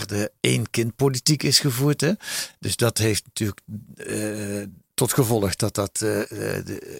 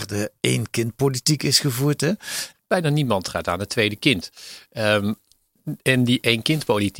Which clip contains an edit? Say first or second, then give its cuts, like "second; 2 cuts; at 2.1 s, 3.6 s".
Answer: second; 1 cut; at 2.5 s